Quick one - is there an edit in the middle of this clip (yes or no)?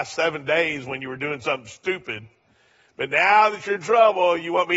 no